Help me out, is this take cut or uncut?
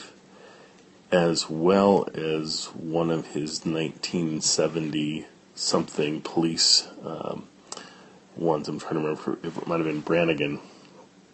uncut